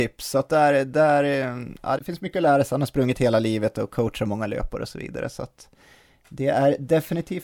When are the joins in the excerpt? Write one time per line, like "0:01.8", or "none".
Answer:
0:02.0